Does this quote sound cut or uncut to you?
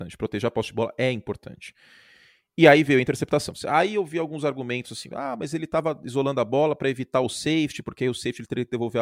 uncut